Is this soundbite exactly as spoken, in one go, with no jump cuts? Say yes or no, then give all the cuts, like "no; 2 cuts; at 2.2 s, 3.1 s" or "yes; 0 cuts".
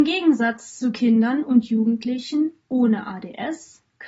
yes; 0 cuts